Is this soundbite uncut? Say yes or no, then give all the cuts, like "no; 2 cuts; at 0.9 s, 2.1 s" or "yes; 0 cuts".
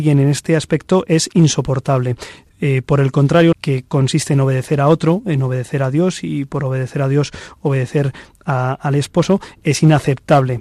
no; 2 cuts; at 2.5 s, 3.5 s